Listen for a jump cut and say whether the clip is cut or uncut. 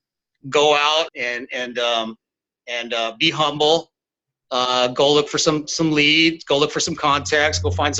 cut